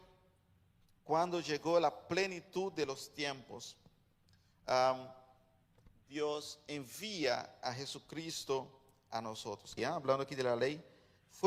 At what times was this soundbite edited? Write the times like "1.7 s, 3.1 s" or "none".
9.8 s

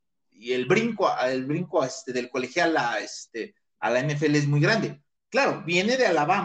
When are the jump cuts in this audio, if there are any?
none

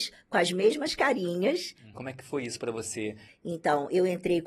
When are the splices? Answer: 1.9 s, 3.3 s

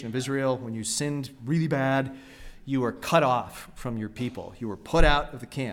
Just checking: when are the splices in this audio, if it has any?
none

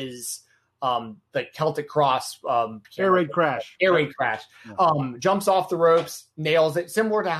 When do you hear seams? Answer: 2.8 s

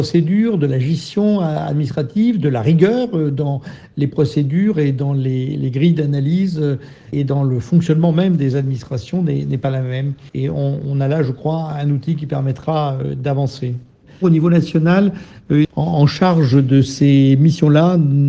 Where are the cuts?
7.1 s, 10.3 s, 15.6 s

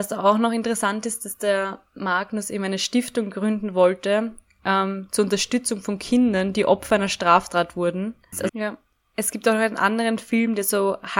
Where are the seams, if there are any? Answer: 8.5 s

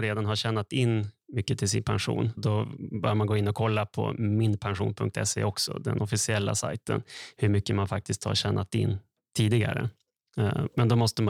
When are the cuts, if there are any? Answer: 2.4 s, 7.3 s

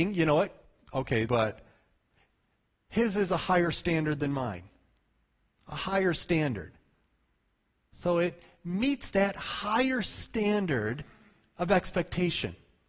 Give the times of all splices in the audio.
1.3 s

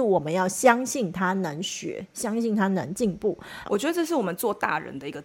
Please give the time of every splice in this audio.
3.7 s

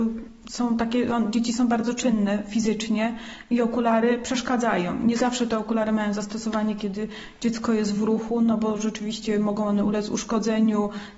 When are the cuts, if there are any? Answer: none

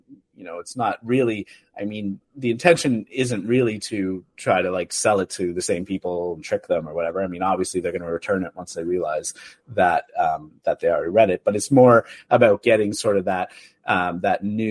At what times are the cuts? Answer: none

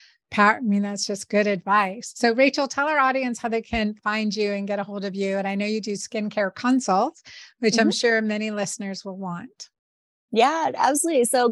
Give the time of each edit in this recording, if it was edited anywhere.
none

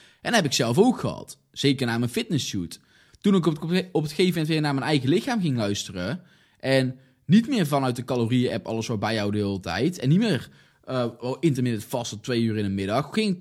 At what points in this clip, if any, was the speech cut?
3.1 s

